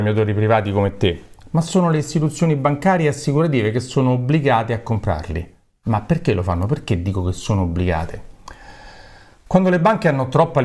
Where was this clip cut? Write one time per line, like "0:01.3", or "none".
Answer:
none